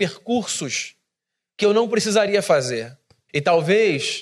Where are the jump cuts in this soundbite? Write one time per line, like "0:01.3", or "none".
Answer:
0:03.3